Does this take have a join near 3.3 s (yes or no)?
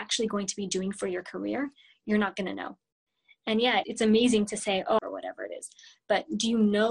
no